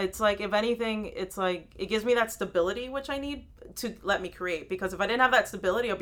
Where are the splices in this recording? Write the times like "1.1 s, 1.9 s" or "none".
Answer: none